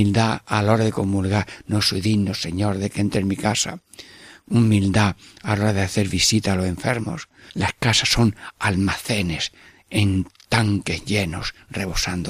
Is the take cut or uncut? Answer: cut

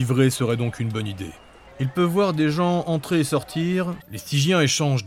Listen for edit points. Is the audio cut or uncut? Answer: cut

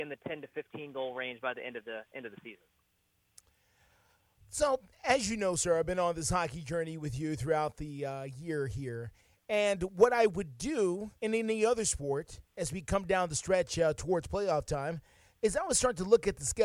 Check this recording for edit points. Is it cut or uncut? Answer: cut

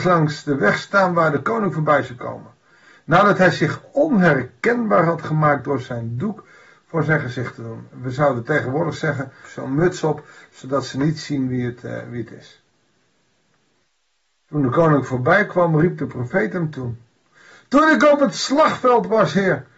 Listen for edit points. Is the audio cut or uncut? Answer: cut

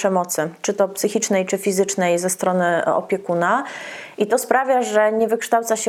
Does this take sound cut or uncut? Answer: uncut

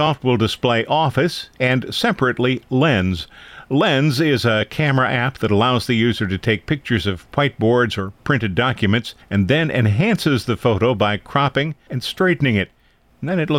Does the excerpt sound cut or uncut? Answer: cut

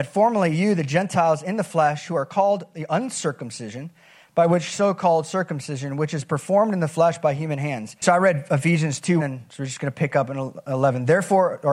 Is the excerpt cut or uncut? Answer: cut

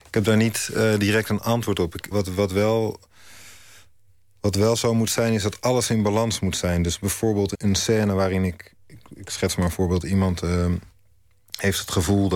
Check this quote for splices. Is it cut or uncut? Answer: cut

